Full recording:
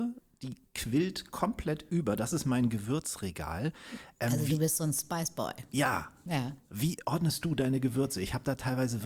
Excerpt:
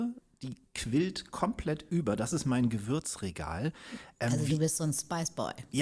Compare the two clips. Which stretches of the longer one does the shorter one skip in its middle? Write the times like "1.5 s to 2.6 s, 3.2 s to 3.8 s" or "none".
none